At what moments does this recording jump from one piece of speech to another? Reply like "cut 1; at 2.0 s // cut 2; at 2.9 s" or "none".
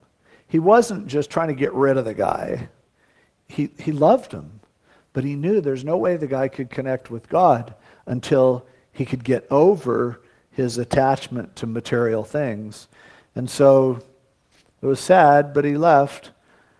none